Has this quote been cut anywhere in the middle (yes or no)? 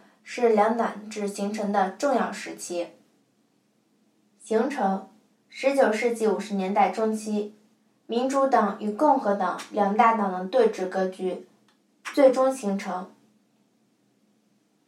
no